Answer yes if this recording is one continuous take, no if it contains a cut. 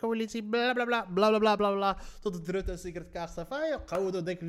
yes